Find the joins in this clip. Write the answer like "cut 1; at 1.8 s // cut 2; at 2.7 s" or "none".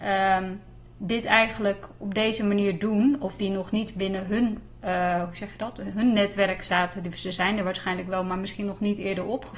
none